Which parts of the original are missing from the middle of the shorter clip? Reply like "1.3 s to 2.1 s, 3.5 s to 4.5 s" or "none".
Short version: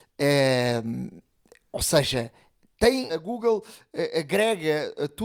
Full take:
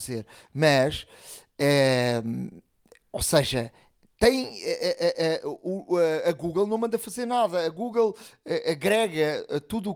4.5 s to 7.6 s

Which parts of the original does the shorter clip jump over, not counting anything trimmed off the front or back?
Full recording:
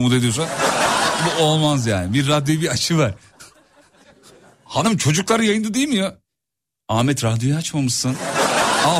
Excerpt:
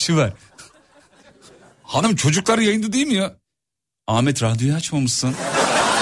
none

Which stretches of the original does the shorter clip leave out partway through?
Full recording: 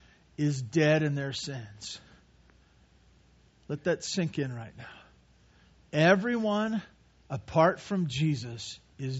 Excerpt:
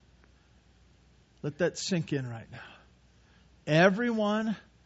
none

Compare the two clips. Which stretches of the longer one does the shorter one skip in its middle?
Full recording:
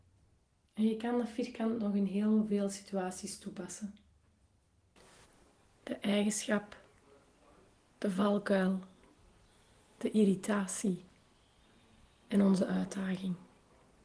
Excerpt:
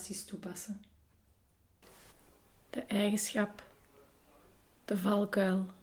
none

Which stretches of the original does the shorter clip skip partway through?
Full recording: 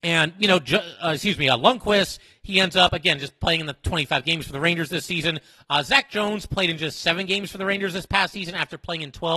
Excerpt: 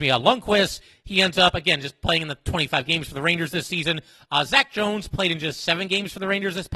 none

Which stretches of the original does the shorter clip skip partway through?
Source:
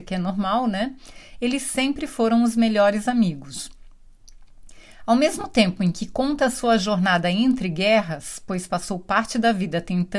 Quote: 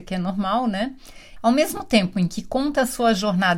1.4 s to 5.0 s

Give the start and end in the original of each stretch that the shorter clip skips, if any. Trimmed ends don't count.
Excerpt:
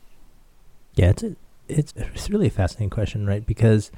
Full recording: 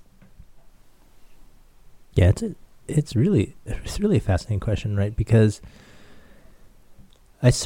3.1 s to 3.6 s

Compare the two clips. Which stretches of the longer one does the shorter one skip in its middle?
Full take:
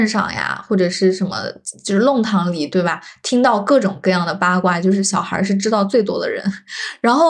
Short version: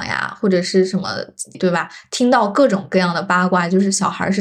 1.8 s to 2.7 s

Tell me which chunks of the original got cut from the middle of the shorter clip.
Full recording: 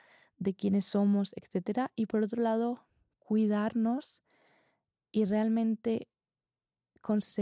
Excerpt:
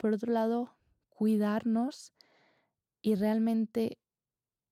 none

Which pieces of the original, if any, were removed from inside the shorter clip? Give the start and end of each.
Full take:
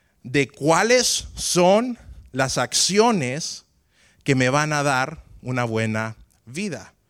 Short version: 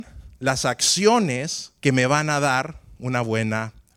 3.7 s to 4.2 s

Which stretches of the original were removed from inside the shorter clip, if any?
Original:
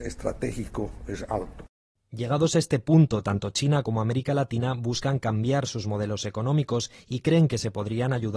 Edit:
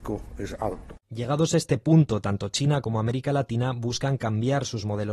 1.7 s to 2.0 s

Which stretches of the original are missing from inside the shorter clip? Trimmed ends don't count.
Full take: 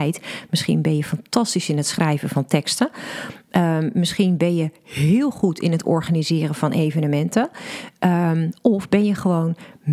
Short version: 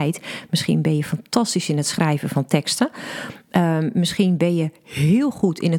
none

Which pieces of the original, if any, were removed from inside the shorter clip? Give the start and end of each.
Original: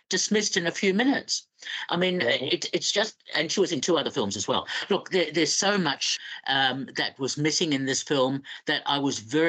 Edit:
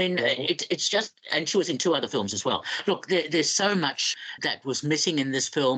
6.4 s to 6.9 s

